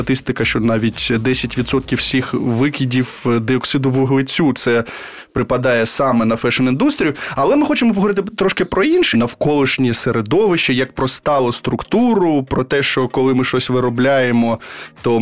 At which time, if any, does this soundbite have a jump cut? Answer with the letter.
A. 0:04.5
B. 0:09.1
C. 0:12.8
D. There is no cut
B